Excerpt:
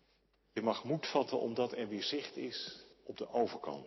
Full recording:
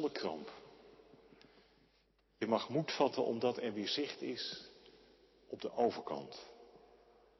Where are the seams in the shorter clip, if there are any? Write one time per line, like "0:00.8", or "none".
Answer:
0:02.9